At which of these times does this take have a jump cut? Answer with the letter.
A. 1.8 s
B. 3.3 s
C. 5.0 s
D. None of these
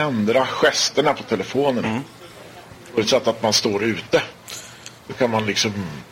A